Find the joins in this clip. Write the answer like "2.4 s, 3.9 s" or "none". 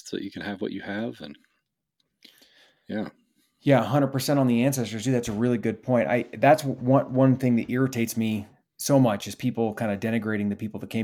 none